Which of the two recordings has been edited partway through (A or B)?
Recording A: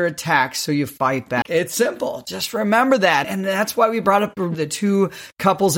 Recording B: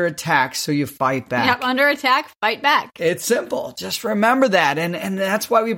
A